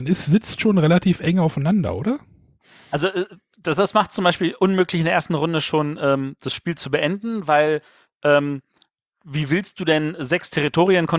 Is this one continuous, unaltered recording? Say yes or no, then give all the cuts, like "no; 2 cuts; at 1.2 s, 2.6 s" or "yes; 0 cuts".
yes; 0 cuts